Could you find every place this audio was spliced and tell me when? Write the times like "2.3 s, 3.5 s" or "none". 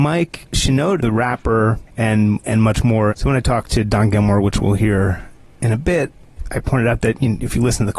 1.0 s, 3.1 s